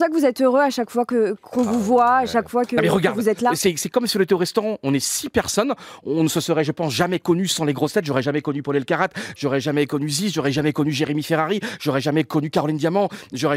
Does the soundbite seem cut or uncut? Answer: uncut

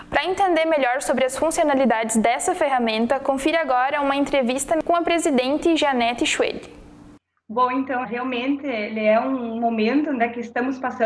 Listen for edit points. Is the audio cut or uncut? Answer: cut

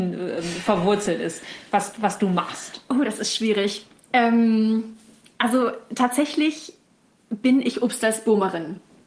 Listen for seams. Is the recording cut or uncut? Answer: uncut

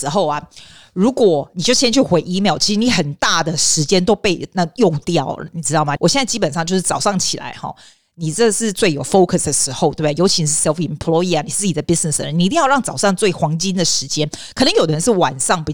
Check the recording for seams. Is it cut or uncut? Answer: cut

